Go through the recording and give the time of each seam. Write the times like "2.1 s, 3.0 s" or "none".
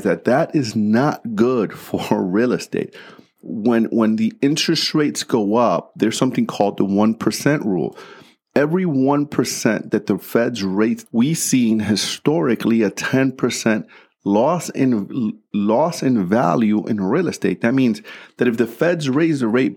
11.1 s